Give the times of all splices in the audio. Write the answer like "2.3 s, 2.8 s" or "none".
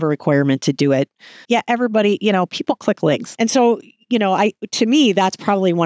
1.4 s, 3.4 s